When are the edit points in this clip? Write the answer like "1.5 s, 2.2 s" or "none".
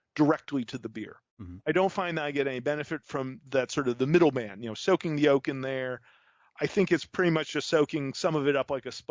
1.3 s